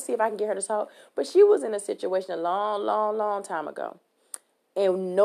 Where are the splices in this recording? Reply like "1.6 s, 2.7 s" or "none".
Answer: none